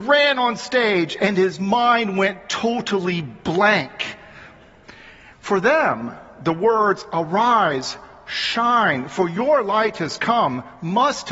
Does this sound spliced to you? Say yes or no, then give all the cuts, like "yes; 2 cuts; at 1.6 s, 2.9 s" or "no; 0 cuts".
yes; 1 cut; at 5.3 s